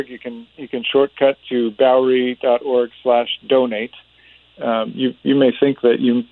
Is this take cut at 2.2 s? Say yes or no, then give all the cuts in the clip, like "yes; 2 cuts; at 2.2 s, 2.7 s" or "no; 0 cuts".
no; 1 cut; at 4.6 s